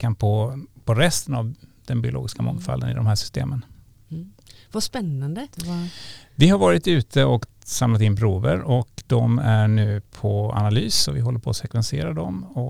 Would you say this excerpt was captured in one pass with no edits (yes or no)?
no